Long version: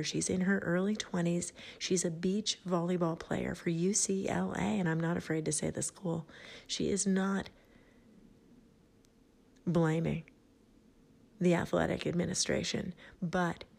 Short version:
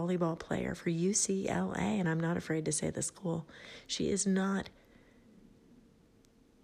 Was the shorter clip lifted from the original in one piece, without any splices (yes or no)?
yes